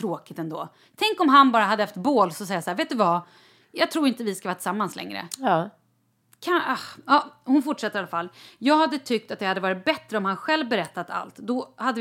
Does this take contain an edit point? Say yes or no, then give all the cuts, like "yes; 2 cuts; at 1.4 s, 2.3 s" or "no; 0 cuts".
no; 0 cuts